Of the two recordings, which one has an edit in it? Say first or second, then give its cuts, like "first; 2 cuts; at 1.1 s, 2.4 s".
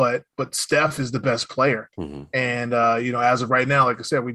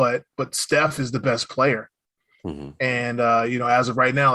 first; 1 cut; at 1.9 s